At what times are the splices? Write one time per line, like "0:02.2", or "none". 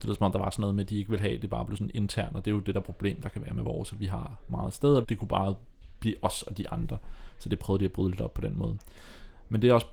0:05.0